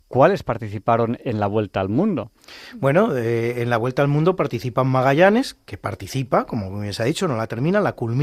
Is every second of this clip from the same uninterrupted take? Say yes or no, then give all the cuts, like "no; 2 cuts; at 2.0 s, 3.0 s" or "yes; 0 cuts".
yes; 0 cuts